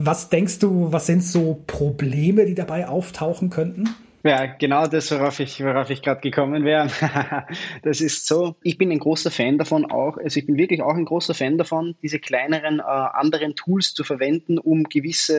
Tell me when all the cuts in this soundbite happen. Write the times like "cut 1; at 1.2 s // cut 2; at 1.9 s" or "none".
none

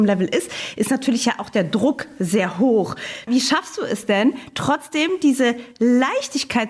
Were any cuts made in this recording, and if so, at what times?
none

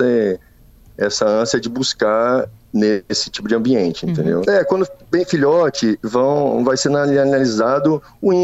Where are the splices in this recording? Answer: cut 1; at 4.4 s

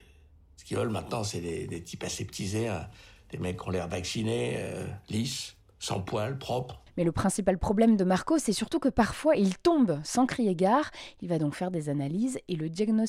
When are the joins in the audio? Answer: cut 1; at 5.0 s

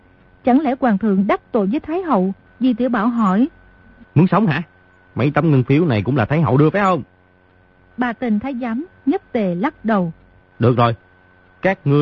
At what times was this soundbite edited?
cut 1; at 2.5 s // cut 2; at 5.0 s // cut 3; at 10.4 s

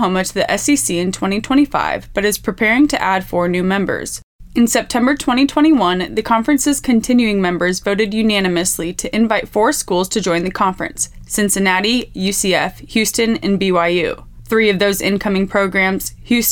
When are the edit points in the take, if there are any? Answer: none

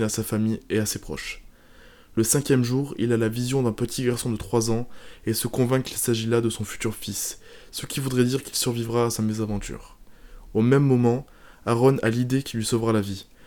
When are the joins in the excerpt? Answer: none

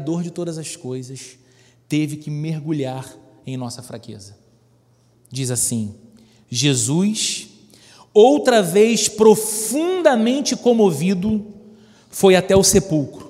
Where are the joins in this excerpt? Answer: cut 1; at 5.1 s

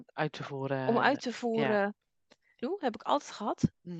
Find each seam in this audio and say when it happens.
cut 1; at 2.6 s

